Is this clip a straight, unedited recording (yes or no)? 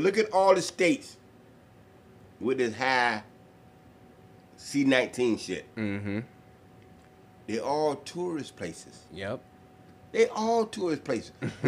yes